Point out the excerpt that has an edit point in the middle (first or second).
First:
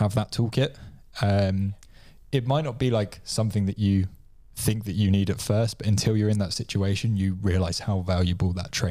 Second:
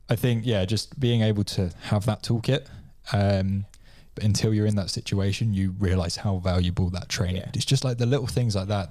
second